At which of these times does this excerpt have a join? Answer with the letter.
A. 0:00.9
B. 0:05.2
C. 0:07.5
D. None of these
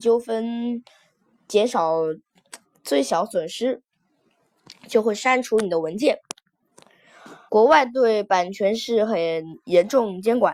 C